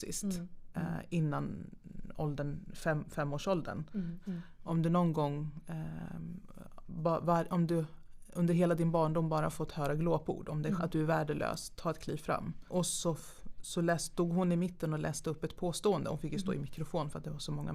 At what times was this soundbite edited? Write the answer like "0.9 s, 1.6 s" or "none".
4.2 s, 10.8 s, 12.7 s